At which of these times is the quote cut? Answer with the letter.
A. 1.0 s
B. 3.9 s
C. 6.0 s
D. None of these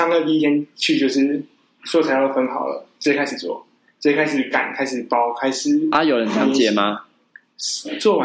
D